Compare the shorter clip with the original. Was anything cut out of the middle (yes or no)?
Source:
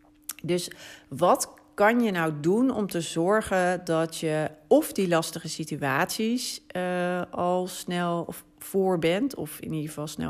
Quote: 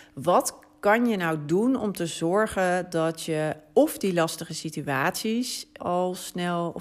yes